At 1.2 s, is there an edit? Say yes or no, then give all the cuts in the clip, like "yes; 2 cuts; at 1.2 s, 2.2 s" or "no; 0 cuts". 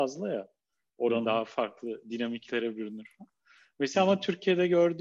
yes; 1 cut; at 1.2 s